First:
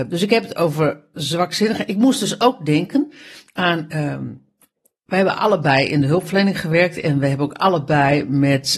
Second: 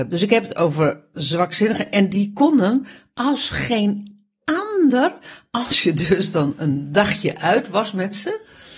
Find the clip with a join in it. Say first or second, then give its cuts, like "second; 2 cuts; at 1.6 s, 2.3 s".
first; 1 cut; at 1.9 s